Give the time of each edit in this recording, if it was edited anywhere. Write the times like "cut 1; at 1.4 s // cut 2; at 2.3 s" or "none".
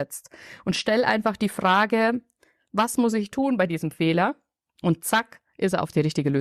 none